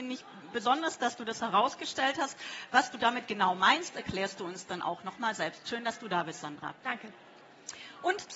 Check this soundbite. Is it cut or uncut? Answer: uncut